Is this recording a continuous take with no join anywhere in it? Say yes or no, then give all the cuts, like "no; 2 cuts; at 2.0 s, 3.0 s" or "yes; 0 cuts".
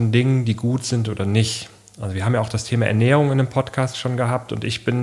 yes; 0 cuts